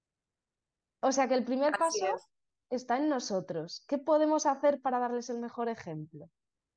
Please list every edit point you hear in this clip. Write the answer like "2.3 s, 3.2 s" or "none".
none